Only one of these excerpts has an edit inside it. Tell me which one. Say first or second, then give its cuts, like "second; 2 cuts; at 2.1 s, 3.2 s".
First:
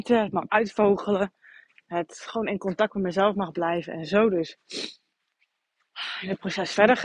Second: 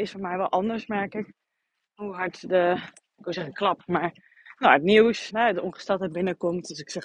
second; 1 cut; at 5.3 s